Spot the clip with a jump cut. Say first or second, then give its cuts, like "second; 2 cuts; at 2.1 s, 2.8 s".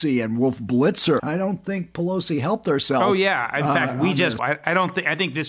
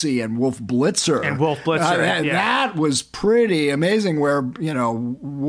first; 2 cuts; at 1.2 s, 4.4 s